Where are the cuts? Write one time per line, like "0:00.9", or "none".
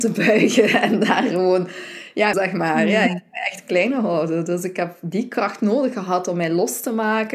0:02.3